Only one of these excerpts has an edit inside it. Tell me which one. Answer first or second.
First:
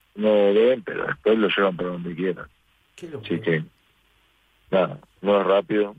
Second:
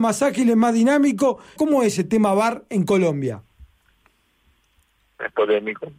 second